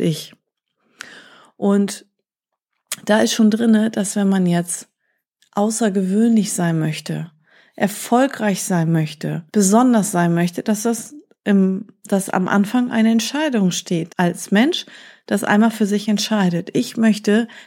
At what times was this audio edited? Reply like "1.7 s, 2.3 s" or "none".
9.5 s, 14.1 s